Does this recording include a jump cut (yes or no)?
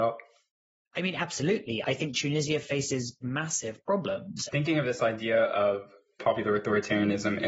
yes